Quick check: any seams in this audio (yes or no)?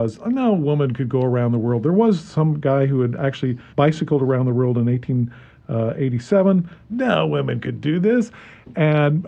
yes